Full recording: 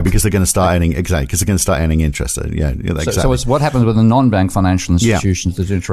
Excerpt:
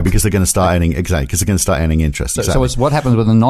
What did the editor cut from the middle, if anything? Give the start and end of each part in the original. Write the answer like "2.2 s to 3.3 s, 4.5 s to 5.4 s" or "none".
2.4 s to 3.0 s